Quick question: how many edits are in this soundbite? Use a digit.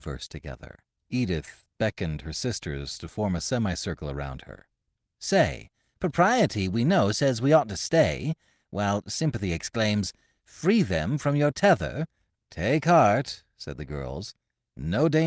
3